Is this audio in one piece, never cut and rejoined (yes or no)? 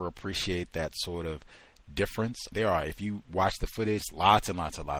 no